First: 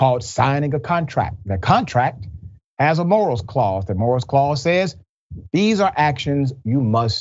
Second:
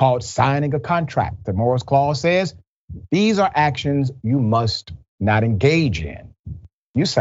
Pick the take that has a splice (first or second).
second